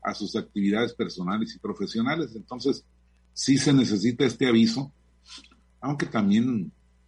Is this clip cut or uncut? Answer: uncut